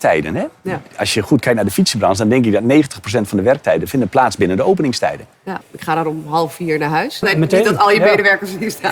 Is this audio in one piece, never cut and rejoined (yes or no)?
no